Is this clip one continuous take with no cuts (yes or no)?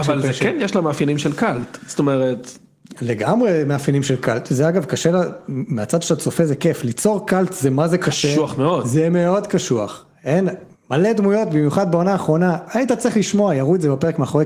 yes